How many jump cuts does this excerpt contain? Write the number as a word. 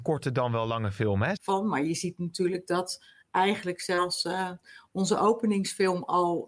one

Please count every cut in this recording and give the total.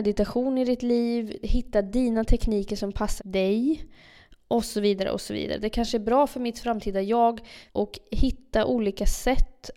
three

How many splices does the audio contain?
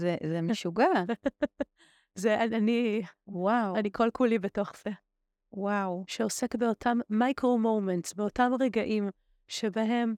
one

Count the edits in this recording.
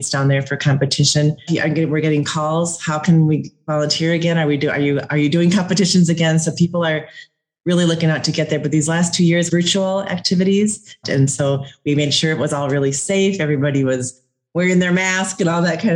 three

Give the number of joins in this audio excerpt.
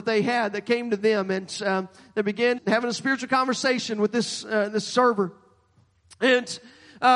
one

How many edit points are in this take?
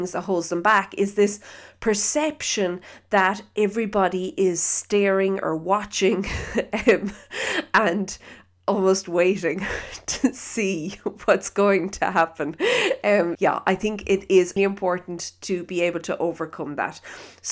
two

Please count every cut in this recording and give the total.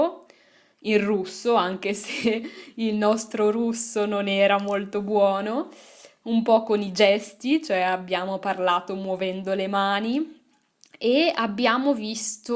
zero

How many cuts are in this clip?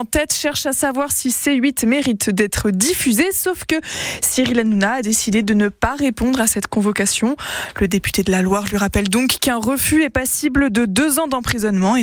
zero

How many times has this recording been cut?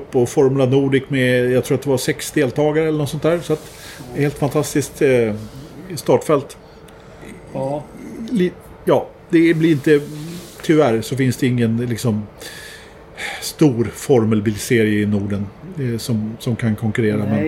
zero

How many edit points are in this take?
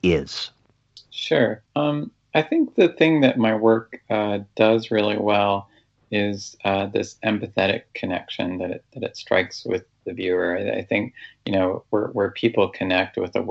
one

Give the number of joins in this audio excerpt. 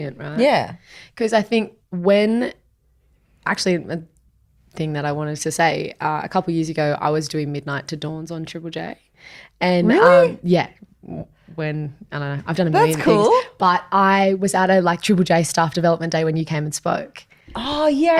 zero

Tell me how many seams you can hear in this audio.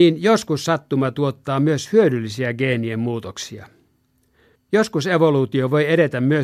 one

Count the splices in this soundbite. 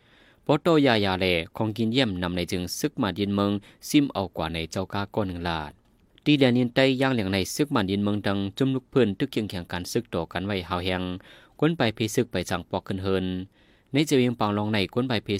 zero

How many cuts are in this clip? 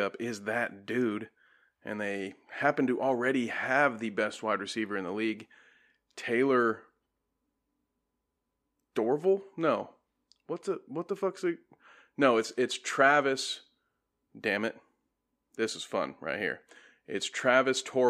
zero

